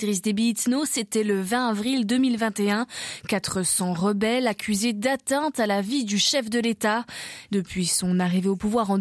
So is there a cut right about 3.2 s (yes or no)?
no